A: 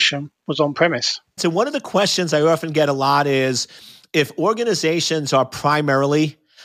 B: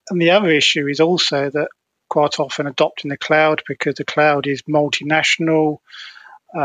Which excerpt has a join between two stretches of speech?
A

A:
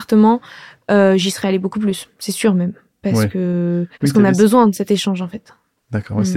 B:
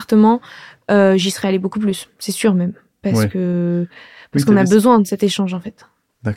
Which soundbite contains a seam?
A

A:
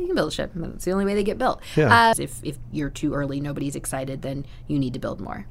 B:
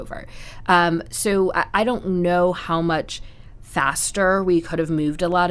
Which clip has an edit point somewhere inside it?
A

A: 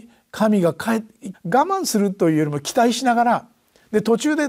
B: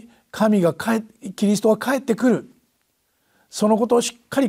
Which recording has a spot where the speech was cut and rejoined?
A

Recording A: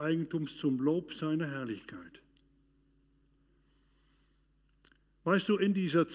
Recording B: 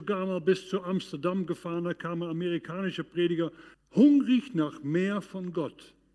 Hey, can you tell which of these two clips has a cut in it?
B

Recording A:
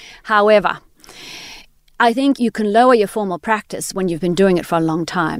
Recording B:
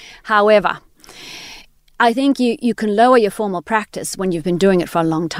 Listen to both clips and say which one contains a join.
A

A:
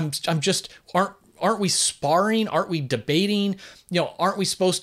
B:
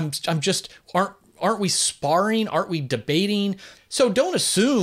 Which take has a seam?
B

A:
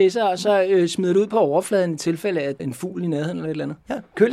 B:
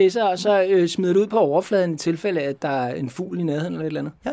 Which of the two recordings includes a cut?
A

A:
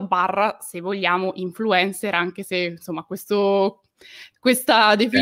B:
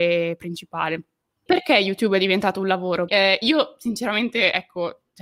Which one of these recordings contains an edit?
B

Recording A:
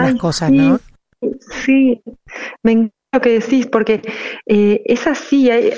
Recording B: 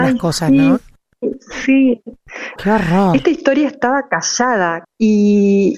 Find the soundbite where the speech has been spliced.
B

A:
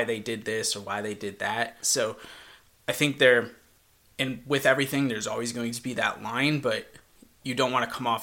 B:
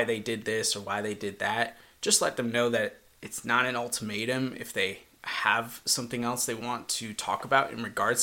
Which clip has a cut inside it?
A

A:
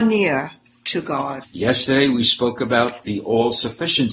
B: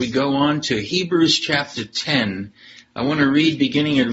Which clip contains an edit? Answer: A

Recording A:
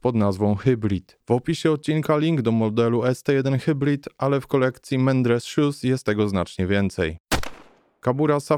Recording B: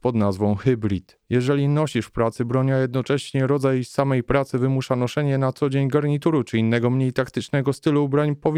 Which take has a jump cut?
A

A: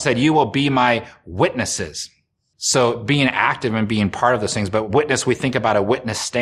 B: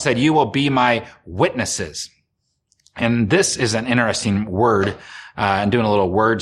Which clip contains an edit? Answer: A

